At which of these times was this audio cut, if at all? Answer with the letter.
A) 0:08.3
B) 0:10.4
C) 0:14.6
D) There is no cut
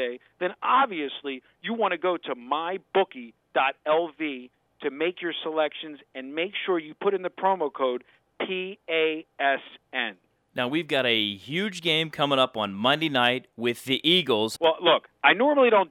C